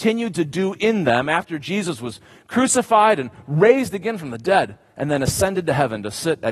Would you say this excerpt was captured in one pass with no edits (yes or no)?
yes